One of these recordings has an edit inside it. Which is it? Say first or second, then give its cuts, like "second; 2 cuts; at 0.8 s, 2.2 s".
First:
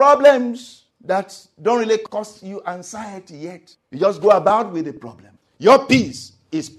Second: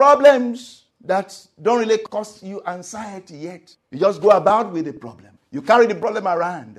first; 1 cut; at 5.4 s